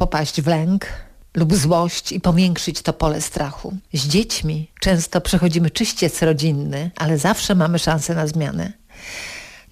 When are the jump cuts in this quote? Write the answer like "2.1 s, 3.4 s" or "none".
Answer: 3.9 s